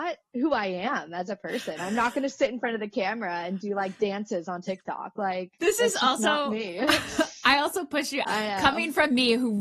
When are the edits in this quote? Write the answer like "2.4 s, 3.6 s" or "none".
8.2 s